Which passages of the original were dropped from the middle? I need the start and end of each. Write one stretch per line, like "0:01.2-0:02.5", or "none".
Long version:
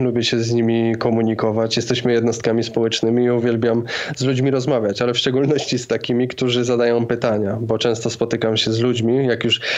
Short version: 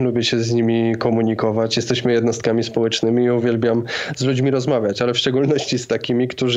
none